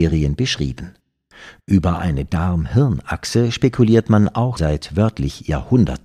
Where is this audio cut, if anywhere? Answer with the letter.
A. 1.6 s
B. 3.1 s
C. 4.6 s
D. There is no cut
C